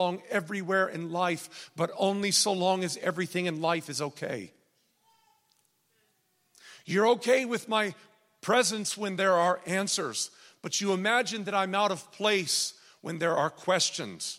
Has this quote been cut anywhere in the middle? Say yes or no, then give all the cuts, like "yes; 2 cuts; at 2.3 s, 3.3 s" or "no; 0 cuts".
no; 0 cuts